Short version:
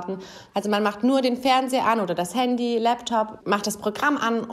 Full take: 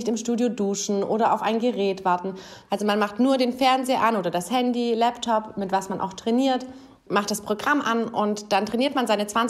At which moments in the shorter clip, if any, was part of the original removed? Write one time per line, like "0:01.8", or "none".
0:03.4